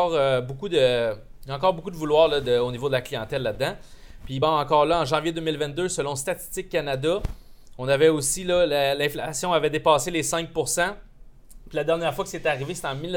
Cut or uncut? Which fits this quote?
uncut